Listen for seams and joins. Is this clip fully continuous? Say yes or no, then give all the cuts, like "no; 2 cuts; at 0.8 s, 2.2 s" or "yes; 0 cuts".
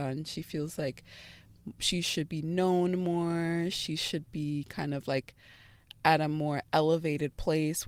yes; 0 cuts